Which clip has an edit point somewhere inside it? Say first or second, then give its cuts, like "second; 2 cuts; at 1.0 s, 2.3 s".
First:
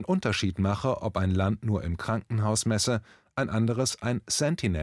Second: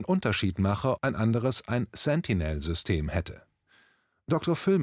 second; 1 cut; at 1.0 s